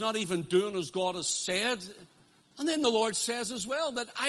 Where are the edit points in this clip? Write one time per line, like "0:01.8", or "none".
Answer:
0:02.4